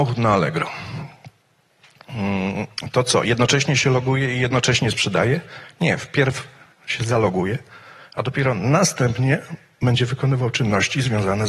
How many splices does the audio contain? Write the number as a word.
zero